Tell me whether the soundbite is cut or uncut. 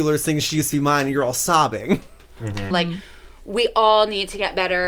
cut